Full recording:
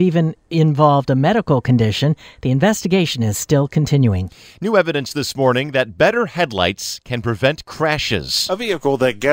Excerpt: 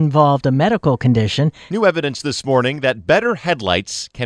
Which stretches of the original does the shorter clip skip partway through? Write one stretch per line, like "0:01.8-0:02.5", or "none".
0:02.3-0:04.6